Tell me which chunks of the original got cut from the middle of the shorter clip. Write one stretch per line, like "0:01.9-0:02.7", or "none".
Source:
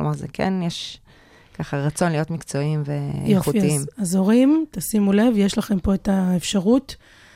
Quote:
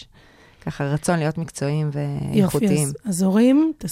none